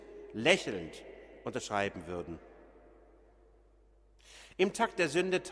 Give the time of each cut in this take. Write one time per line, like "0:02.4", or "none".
none